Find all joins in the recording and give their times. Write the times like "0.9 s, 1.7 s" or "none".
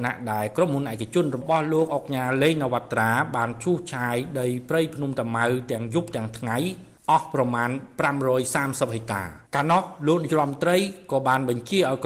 9.5 s